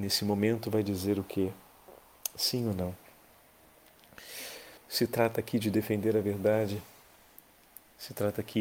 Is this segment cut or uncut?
cut